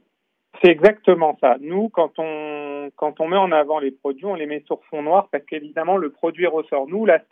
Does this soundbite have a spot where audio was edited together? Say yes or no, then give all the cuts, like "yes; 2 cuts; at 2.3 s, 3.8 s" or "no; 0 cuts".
no; 0 cuts